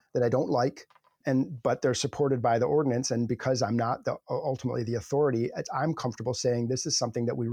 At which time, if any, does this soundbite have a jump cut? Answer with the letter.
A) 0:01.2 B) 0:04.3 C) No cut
A